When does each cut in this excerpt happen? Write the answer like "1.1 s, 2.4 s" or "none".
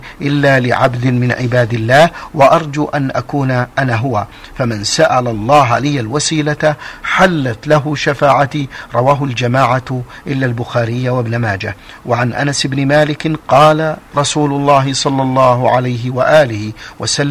13.4 s